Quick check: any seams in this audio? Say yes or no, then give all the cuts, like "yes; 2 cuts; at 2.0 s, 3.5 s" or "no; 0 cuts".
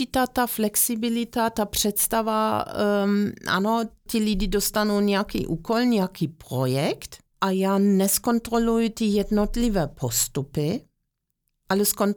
yes; 2 cuts; at 4.1 s, 7.3 s